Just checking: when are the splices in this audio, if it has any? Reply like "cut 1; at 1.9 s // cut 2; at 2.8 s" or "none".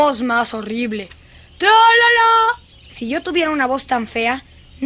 cut 1; at 2.7 s